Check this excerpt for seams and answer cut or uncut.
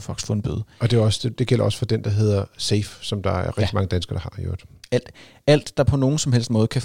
uncut